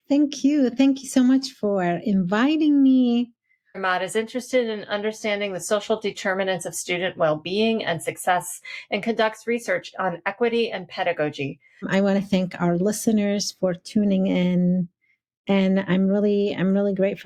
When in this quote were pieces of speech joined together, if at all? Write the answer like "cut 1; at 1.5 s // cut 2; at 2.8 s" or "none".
cut 1; at 3.7 s // cut 2; at 11.8 s